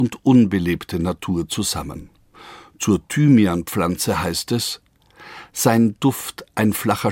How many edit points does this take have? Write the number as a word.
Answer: zero